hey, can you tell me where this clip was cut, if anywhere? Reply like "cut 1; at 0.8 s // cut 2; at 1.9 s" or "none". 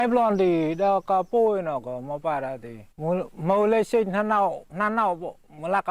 cut 1; at 2.9 s // cut 2; at 4.7 s